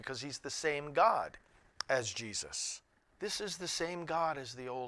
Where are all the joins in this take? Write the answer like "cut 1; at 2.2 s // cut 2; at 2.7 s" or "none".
cut 1; at 3.1 s